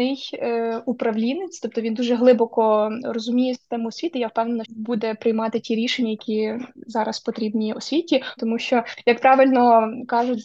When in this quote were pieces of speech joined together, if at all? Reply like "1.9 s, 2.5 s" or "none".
4.6 s, 8.4 s